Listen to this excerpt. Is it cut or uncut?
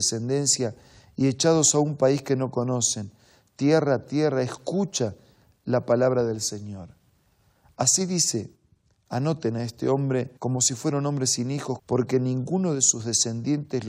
cut